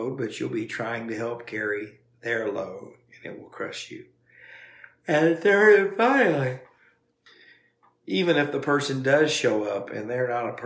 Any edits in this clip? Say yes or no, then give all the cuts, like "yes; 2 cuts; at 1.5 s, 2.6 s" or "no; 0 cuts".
no; 0 cuts